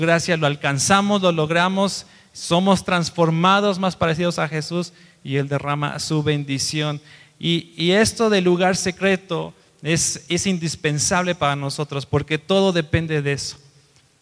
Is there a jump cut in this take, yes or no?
no